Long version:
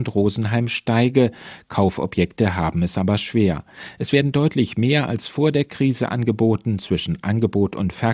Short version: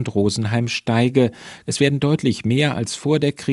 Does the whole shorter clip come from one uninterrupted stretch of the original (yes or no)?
no